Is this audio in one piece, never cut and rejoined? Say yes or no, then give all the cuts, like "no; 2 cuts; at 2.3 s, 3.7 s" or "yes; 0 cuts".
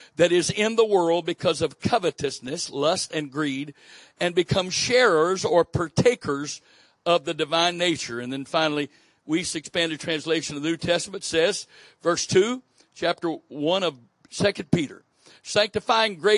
yes; 0 cuts